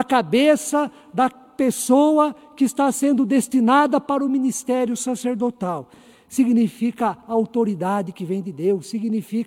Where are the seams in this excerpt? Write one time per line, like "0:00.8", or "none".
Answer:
none